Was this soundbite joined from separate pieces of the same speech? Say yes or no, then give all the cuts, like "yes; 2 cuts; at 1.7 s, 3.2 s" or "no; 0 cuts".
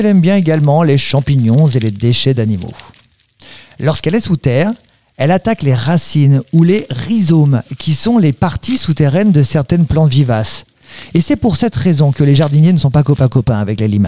no; 0 cuts